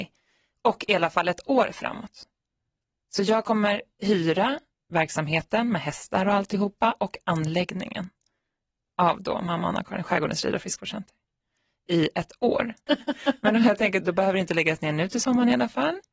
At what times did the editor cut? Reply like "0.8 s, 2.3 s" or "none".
12.9 s, 14.0 s